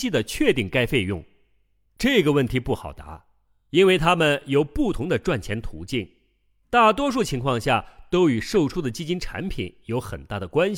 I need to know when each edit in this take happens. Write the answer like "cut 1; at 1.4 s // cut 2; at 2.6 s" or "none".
cut 1; at 1.9 s